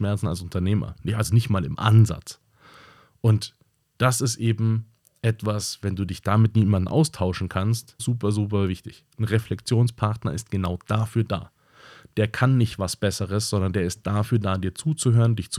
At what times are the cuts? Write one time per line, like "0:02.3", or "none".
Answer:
0:08.0